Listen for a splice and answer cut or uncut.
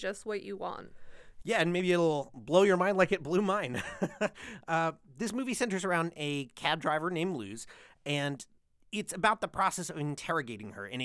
uncut